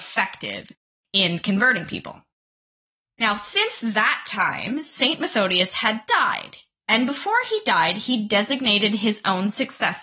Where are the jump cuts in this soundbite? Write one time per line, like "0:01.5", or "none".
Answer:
none